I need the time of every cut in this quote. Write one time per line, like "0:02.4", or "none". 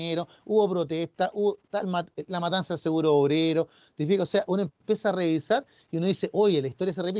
none

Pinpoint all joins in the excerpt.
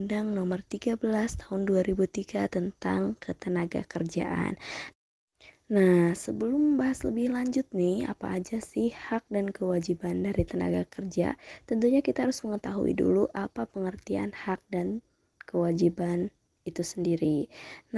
none

